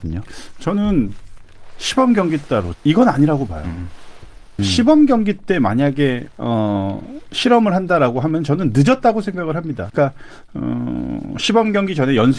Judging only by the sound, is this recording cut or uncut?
cut